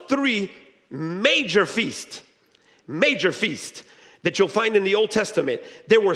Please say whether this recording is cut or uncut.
uncut